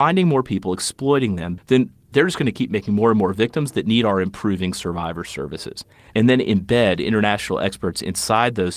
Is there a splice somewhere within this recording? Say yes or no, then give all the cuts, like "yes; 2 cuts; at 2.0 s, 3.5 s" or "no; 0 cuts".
yes; 2 cuts; at 1.6 s, 6.1 s